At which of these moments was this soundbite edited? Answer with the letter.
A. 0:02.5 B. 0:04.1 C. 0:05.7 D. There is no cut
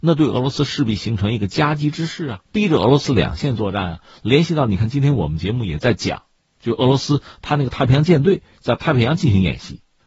A